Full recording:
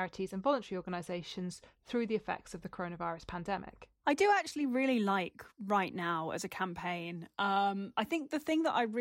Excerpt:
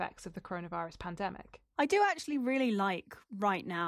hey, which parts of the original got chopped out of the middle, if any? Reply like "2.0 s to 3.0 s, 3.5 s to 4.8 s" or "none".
none